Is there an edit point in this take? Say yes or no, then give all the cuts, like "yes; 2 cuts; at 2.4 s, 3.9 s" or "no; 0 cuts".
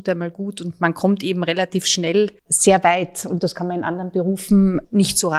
yes; 1 cut; at 2.4 s